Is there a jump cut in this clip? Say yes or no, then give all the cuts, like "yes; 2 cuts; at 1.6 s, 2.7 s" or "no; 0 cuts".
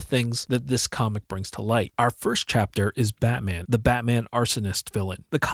yes; 1 cut; at 3.6 s